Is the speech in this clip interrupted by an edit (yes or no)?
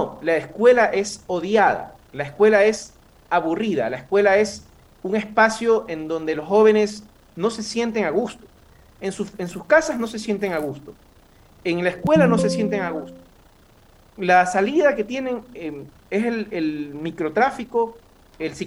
no